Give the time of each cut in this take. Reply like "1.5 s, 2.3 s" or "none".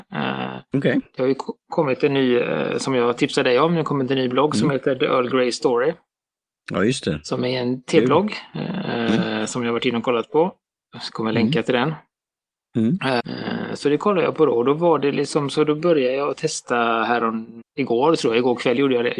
13.2 s, 17.6 s